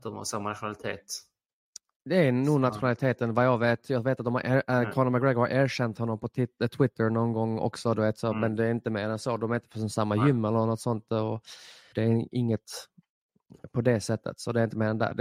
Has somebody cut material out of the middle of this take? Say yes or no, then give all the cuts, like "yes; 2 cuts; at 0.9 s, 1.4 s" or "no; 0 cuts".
yes; 1 cut; at 11.9 s